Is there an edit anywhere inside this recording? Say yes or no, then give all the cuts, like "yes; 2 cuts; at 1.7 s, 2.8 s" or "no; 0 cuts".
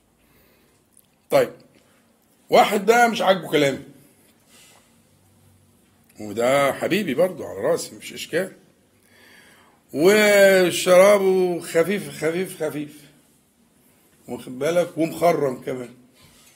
no; 0 cuts